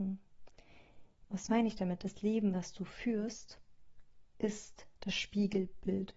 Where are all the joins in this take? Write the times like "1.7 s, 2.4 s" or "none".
1.2 s